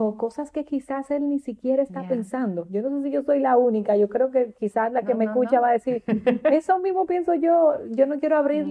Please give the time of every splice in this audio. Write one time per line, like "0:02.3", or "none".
none